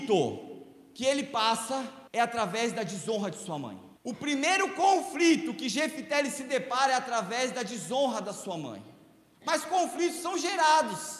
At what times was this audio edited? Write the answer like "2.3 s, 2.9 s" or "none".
2.1 s, 4.0 s, 9.3 s